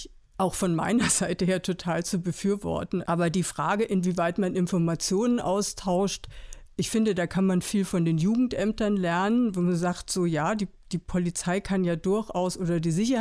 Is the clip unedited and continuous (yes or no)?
no